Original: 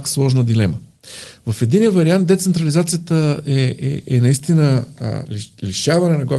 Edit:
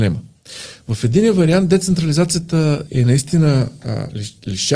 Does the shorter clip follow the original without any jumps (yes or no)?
no